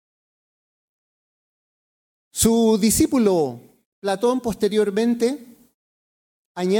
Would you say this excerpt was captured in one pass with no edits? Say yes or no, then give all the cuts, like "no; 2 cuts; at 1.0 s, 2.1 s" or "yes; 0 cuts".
yes; 0 cuts